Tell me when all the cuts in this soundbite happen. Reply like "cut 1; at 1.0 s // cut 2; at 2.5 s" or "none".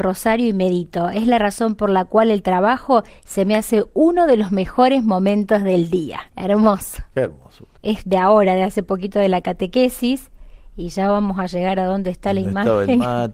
cut 1; at 6.3 s // cut 2; at 7.7 s